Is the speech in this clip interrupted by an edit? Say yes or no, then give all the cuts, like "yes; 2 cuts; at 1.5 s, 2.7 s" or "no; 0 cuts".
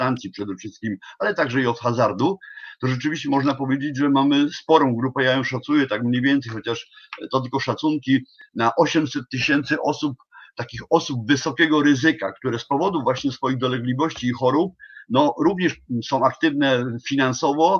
no; 0 cuts